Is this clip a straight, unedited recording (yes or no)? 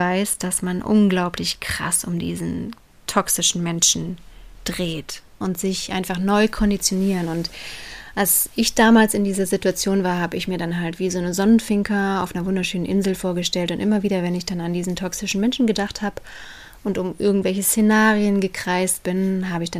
no